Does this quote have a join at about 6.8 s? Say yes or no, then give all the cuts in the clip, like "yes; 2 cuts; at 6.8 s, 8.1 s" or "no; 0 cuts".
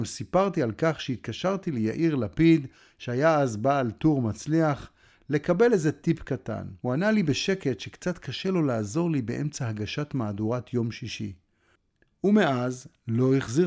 yes; 1 cut; at 6.8 s